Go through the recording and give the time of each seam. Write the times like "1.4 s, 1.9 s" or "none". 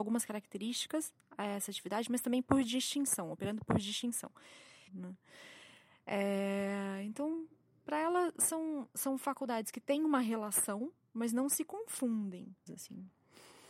4.9 s, 12.7 s

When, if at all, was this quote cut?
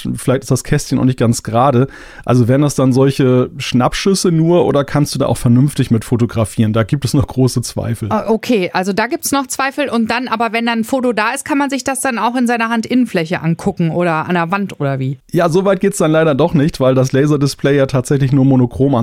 none

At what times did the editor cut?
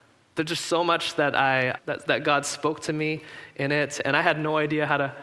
1.8 s

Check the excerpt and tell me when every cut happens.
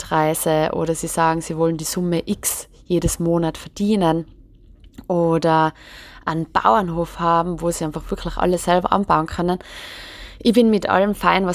none

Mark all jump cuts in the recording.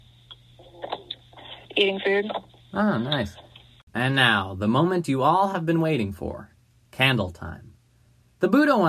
1.6 s

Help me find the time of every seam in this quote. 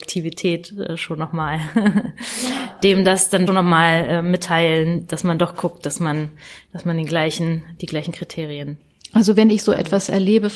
3.5 s

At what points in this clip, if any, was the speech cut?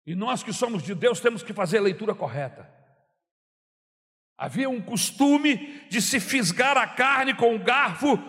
none

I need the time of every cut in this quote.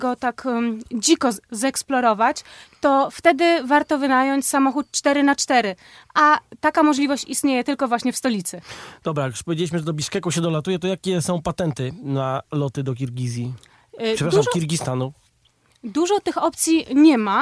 none

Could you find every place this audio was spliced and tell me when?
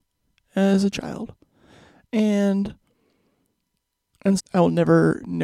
4.4 s

